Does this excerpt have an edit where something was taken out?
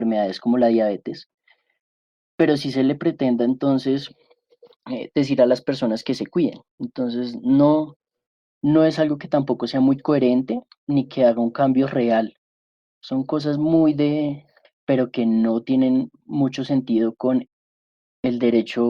yes; 2 cuts; at 6.7 s, 14.6 s

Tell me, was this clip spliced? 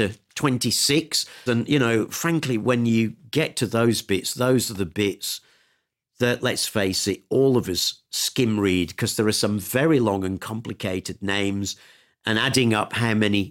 yes; 1 cut; at 1.5 s

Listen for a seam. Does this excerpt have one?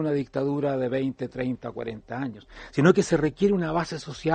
no; 0 cuts

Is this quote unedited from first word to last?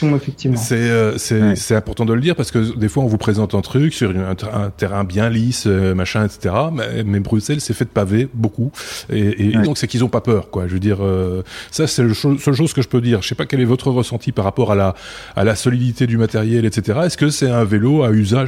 no; 1 cut; at 9.6 s

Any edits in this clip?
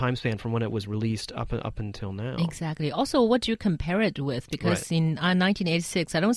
no; 0 cuts

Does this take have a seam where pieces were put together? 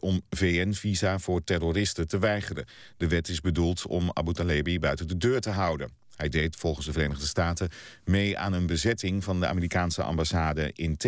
no; 0 cuts

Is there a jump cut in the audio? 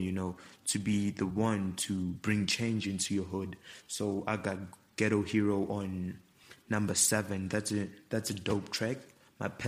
no; 0 cuts

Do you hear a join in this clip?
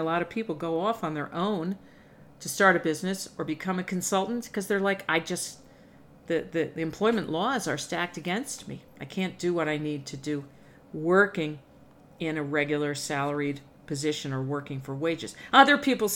no; 0 cuts

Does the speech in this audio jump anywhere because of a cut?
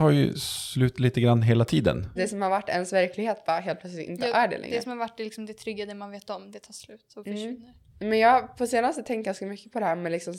yes; 1 cut; at 2.2 s

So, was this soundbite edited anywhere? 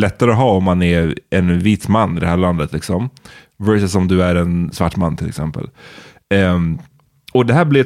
no; 0 cuts

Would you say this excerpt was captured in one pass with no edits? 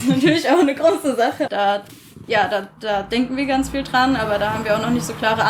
no; 1 cut; at 1.5 s

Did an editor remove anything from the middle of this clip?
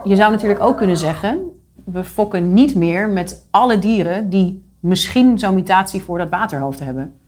yes; 1 cut; at 1.7 s

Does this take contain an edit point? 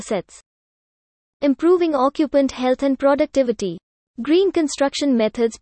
yes; 1 cut; at 4.0 s

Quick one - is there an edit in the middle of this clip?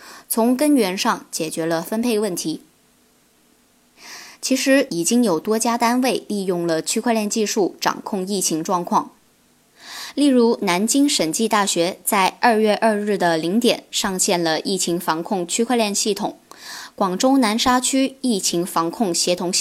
yes; 1 cut; at 4.9 s

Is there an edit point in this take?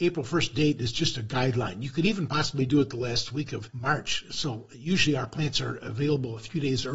no; 0 cuts

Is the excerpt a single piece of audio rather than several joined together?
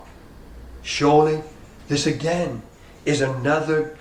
yes; 0 cuts

